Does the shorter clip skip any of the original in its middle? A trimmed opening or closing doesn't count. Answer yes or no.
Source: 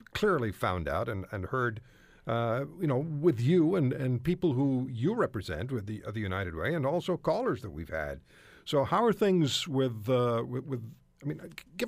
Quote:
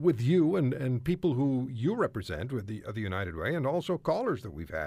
no